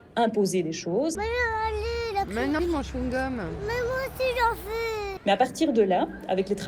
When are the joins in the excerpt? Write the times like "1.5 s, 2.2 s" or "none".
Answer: 1.1 s, 2.6 s, 5.2 s